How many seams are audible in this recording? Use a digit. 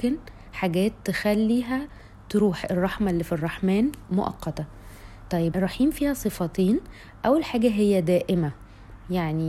1